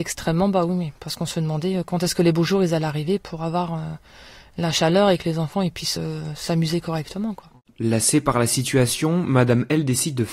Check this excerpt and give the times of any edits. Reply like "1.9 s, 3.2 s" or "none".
none